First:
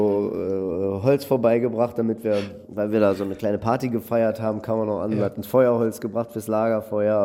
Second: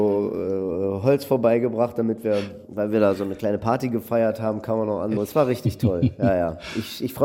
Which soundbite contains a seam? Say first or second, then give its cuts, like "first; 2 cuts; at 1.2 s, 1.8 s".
second; 1 cut; at 5.2 s